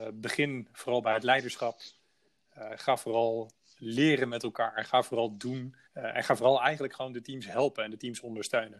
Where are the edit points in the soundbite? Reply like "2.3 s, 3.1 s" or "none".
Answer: 5.8 s